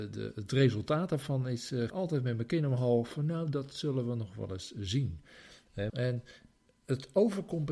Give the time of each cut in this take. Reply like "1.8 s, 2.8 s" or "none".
1.9 s, 5.9 s